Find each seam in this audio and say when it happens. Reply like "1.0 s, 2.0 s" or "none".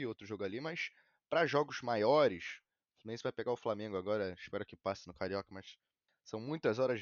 6.1 s